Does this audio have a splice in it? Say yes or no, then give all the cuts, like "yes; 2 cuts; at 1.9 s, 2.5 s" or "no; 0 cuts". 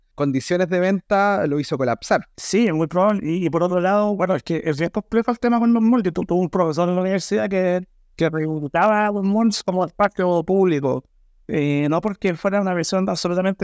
yes; 1 cut; at 2.3 s